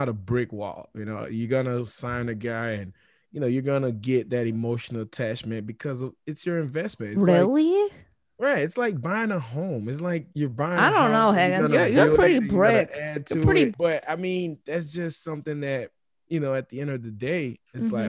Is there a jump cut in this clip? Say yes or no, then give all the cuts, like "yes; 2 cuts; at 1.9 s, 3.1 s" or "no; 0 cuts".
yes; 1 cut; at 13.7 s